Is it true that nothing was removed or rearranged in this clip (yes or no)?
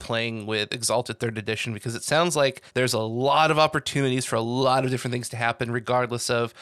no